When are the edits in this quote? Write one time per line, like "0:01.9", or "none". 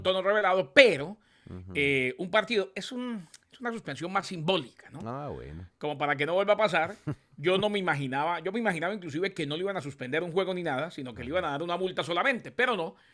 none